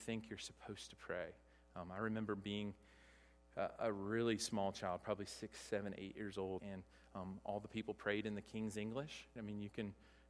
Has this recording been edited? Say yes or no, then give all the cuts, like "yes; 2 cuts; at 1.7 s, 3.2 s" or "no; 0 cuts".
yes; 2 cuts; at 6.6 s, 9.4 s